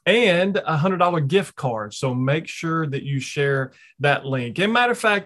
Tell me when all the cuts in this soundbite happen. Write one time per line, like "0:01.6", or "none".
none